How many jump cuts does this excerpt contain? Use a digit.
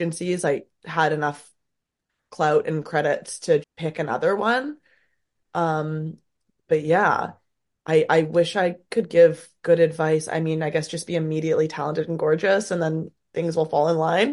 1